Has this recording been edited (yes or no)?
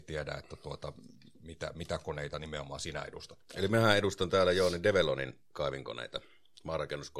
no